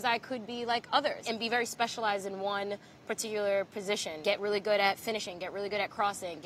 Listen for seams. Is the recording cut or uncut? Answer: uncut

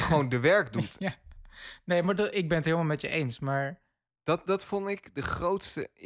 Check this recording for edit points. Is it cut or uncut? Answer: uncut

